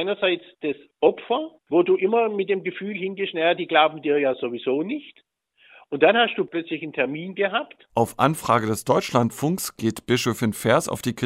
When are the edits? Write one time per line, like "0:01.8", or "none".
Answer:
0:07.9